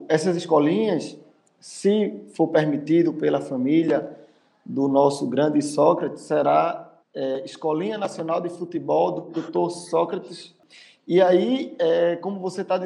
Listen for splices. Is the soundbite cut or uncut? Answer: cut